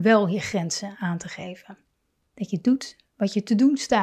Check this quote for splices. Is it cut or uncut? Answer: cut